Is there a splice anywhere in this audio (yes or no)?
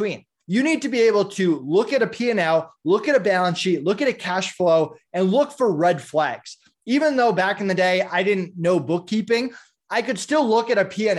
no